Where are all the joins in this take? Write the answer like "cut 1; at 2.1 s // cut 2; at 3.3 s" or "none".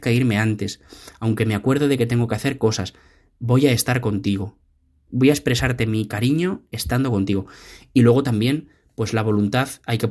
cut 1; at 5.1 s